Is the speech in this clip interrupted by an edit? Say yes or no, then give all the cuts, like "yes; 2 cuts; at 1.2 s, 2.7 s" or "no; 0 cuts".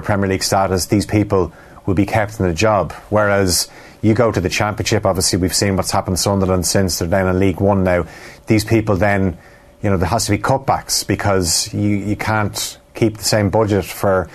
no; 0 cuts